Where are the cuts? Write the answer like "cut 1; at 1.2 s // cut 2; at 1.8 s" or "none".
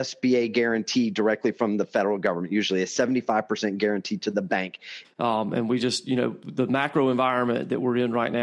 cut 1; at 5.0 s